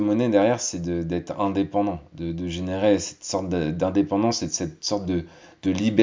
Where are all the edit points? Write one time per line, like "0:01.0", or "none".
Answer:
none